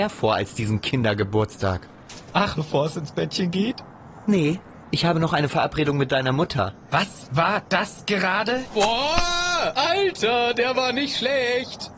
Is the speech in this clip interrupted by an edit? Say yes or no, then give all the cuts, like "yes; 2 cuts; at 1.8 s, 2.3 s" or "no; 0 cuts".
yes; 1 cut; at 2.6 s